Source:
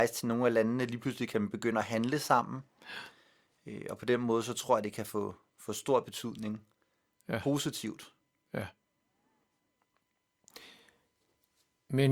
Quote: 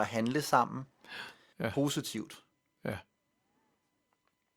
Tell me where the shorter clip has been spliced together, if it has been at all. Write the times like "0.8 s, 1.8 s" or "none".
1.5 s